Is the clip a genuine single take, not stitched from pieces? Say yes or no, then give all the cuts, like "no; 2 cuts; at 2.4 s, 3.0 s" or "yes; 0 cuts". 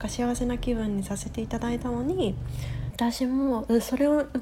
no; 1 cut; at 2.9 s